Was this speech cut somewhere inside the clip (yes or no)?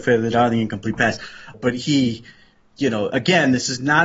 yes